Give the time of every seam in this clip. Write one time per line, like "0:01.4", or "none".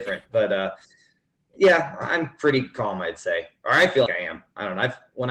0:04.1